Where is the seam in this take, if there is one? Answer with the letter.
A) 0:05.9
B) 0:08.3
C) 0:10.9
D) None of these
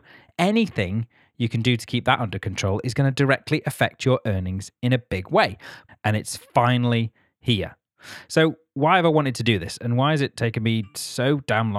A